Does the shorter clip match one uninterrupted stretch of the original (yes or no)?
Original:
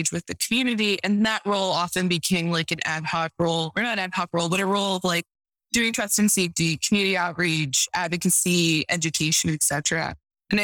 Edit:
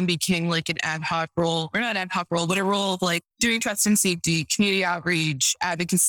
no